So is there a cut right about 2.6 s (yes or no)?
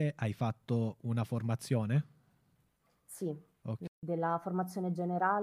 no